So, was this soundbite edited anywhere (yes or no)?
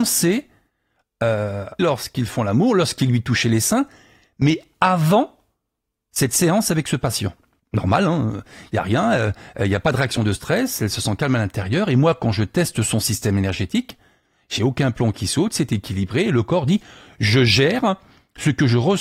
yes